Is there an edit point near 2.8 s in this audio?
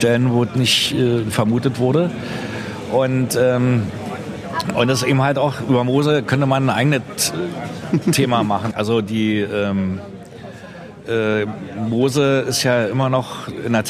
no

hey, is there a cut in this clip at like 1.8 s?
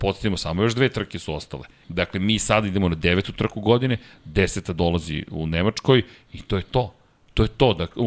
yes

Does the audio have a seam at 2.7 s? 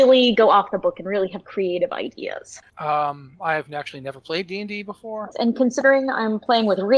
yes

